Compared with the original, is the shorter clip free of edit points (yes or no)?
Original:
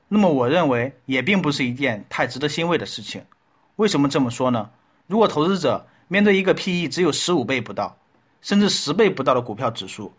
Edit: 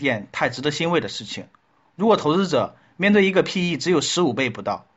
no